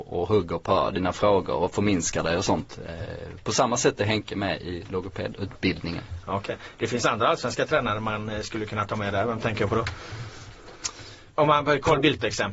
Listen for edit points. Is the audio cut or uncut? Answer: uncut